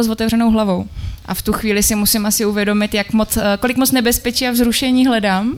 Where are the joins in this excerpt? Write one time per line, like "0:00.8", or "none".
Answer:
0:01.2